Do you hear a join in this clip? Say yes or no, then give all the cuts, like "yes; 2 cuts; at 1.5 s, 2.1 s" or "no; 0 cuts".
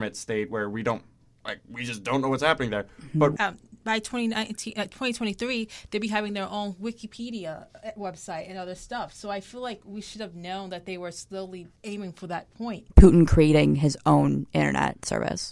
yes; 3 cuts; at 3.4 s, 11.8 s, 12.9 s